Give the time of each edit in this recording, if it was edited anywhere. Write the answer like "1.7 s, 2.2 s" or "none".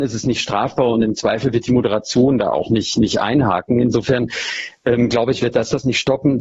none